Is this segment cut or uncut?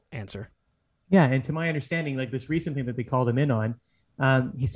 uncut